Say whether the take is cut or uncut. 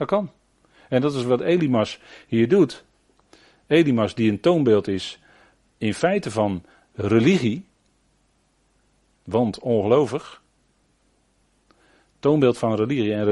uncut